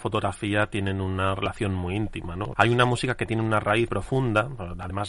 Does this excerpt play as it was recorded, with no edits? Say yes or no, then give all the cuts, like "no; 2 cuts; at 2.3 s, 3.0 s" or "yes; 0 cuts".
no; 2 cuts; at 2.5 s, 3.9 s